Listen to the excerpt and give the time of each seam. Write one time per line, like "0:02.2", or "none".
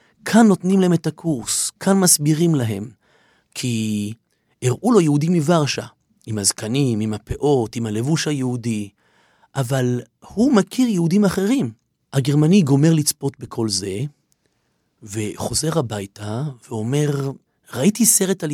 0:03.4
0:12.0